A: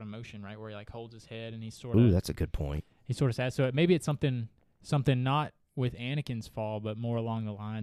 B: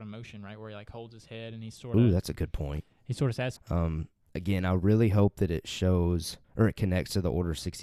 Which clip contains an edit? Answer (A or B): B